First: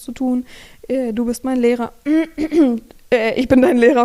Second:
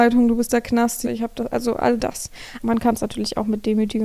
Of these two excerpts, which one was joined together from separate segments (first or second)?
second